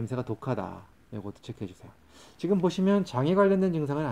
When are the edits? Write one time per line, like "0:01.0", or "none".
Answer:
0:01.0